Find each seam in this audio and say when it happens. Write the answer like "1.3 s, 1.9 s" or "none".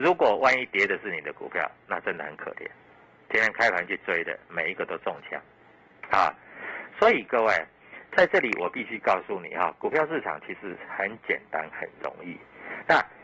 none